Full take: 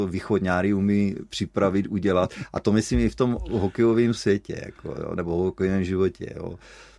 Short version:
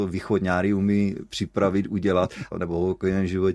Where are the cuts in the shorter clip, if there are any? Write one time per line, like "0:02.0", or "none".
0:02.5